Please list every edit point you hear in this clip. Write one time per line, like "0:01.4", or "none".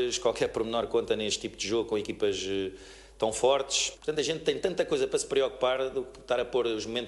0:04.0